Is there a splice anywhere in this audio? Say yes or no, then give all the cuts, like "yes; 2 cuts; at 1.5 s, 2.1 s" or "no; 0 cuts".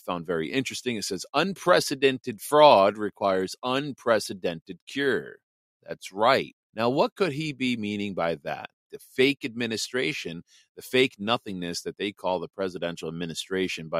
yes; 2 cuts; at 6.7 s, 8.9 s